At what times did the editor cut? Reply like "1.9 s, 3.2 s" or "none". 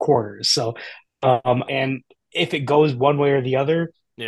1.6 s